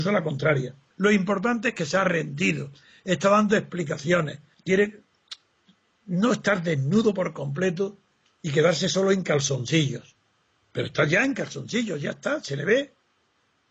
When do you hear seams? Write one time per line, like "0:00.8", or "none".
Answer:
0:00.9
0:04.5